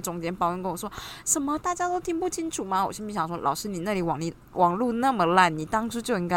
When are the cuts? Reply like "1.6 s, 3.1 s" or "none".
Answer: none

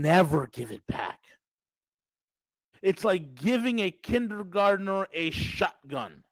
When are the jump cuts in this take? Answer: 2.7 s

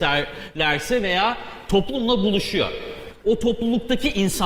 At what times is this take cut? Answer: 3.2 s

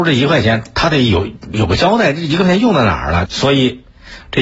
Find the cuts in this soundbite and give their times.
1.5 s, 3.3 s

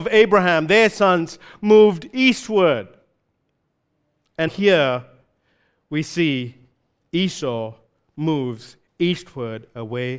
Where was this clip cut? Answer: 4.5 s

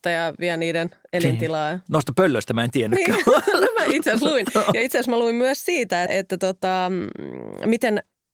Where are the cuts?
6.1 s

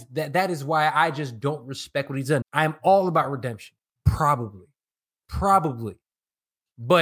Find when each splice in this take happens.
2.4 s, 4.0 s

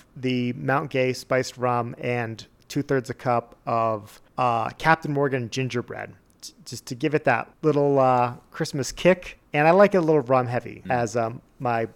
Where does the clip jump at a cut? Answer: 10.8 s

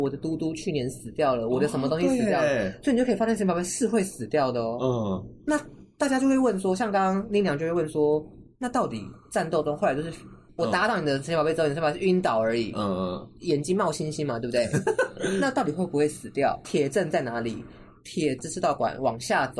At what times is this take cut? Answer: 16.6 s, 18.4 s

